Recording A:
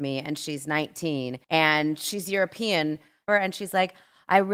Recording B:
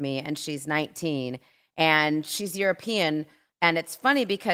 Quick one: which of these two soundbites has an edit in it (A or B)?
A